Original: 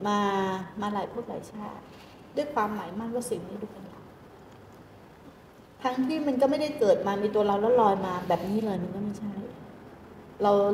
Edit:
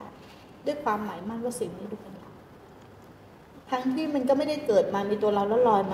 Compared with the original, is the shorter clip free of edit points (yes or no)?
no